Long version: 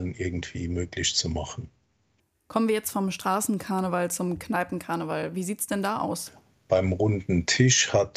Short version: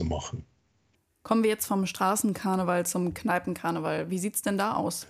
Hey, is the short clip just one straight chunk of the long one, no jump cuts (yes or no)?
yes